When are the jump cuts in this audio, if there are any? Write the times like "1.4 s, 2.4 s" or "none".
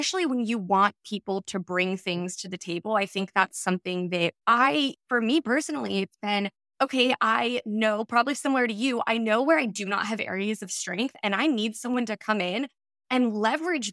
4.4 s